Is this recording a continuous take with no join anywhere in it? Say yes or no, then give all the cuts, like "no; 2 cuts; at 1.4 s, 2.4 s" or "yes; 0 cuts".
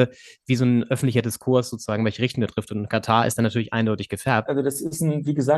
no; 1 cut; at 4.5 s